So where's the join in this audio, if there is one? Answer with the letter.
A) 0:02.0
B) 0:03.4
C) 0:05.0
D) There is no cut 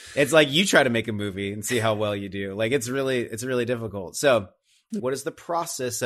C